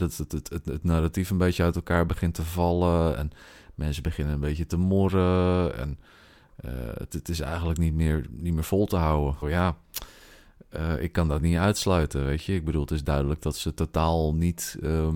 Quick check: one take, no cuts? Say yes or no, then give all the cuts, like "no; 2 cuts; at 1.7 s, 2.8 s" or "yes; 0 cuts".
no; 1 cut; at 9.4 s